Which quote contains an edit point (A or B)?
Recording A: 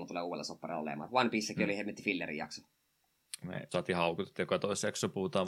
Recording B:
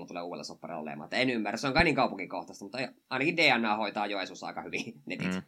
A